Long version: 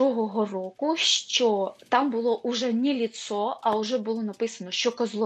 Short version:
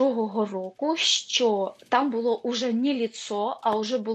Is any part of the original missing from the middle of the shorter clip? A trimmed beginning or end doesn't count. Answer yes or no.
no